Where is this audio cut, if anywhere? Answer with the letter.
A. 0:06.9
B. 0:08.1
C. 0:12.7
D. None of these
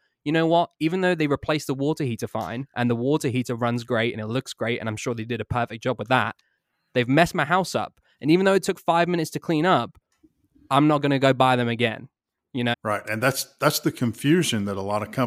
C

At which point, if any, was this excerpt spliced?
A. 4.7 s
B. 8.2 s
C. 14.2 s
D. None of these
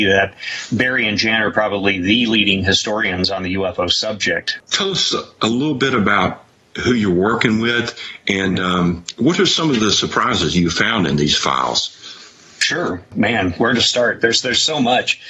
A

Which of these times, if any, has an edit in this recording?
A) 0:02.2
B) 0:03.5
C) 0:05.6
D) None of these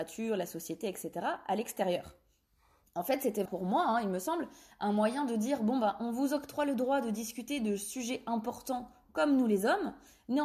B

